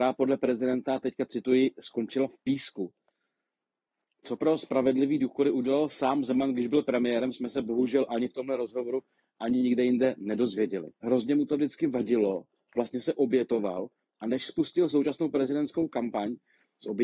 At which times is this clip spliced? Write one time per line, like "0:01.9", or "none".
0:11.0